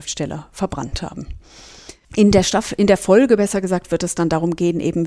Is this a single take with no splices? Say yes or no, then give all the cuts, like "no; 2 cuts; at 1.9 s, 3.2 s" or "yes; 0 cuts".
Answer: yes; 0 cuts